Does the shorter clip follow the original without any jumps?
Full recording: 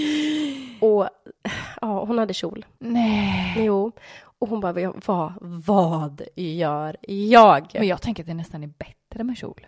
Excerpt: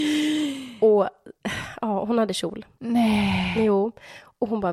yes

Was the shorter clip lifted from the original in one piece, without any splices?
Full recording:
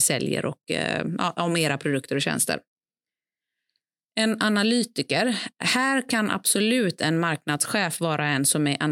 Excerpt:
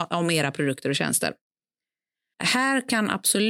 no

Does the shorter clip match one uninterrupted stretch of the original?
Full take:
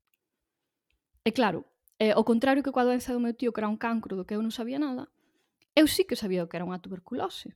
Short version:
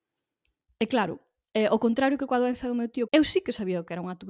no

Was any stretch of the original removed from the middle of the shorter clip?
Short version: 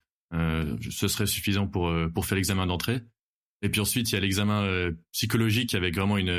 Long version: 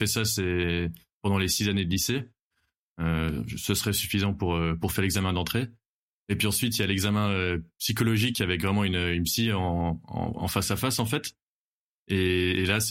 no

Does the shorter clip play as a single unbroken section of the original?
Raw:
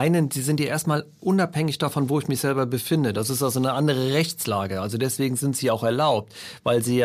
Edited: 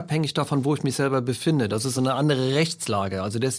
no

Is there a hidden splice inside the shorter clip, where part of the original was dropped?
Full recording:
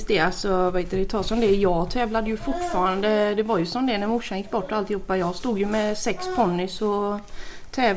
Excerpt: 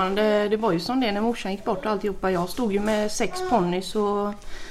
no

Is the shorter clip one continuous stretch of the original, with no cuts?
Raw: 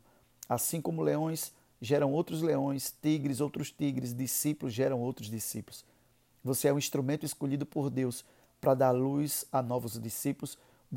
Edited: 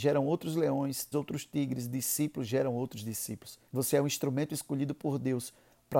no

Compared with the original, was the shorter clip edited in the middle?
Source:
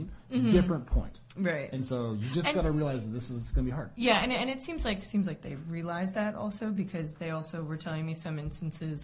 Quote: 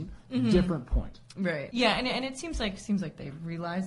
yes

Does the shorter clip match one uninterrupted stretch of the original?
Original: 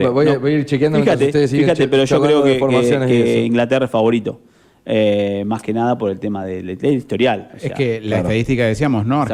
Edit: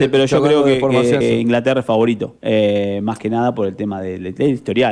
no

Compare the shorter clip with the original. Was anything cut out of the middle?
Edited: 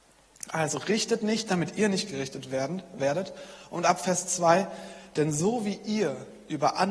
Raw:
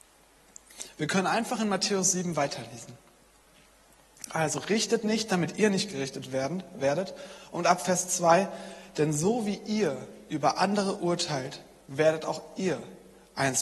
no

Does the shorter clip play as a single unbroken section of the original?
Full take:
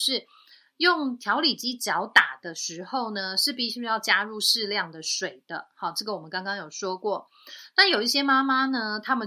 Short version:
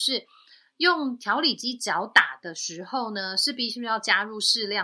yes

